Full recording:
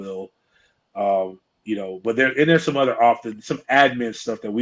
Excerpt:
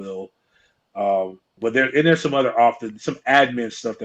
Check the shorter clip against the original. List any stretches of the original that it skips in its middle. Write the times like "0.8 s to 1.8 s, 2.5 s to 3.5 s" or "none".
1.6 s to 2.0 s